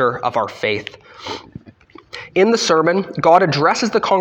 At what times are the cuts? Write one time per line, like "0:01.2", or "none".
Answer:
none